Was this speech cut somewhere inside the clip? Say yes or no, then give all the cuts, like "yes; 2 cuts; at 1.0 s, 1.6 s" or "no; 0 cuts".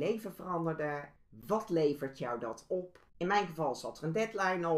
yes; 2 cuts; at 1.2 s, 3.1 s